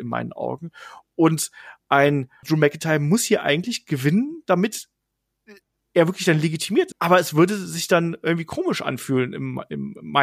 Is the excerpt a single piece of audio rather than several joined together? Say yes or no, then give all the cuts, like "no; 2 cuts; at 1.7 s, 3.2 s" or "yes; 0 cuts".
no; 2 cuts; at 2.4 s, 6.9 s